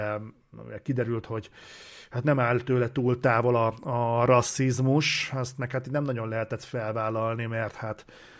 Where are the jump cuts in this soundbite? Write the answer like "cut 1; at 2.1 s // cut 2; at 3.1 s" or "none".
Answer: none